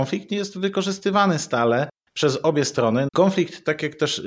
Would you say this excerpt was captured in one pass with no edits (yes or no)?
no